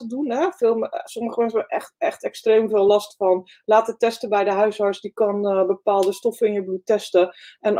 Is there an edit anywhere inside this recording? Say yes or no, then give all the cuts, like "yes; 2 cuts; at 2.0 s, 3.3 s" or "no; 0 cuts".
no; 0 cuts